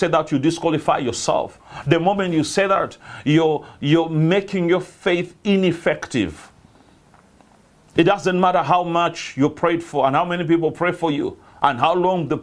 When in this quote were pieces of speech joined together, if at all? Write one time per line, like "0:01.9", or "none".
none